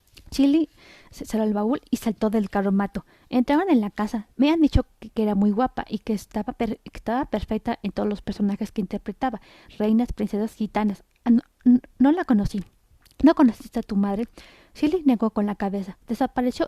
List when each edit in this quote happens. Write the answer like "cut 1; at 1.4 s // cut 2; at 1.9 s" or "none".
cut 1; at 3.2 s // cut 2; at 4.3 s